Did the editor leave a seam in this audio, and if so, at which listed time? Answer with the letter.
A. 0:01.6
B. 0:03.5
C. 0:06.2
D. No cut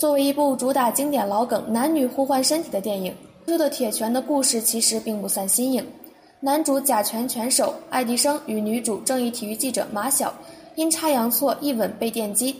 B